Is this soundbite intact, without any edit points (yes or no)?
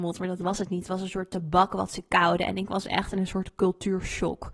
yes